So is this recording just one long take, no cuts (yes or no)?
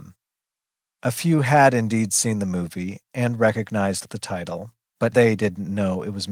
no